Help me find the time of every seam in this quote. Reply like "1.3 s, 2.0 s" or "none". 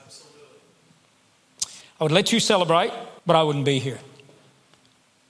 1.8 s, 3.2 s